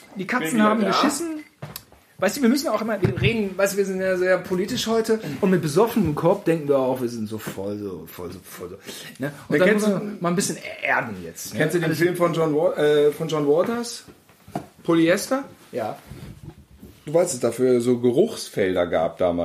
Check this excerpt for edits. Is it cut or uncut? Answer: uncut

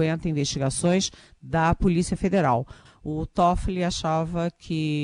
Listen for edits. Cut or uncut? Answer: cut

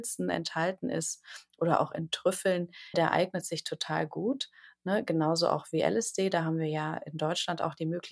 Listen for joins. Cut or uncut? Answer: cut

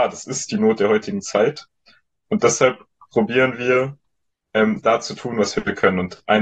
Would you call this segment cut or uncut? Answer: uncut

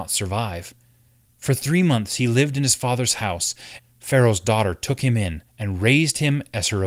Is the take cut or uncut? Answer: cut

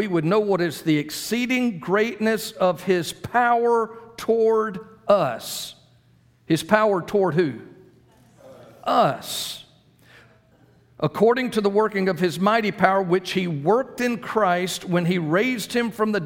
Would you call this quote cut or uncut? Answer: uncut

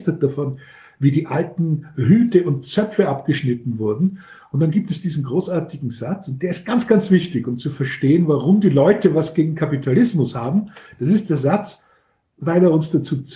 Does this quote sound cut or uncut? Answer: uncut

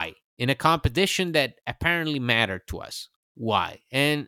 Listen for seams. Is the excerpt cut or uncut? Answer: uncut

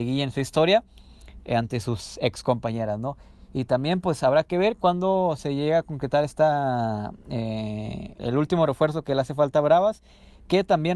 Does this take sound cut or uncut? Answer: cut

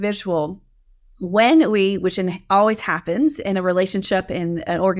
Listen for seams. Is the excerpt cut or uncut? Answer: uncut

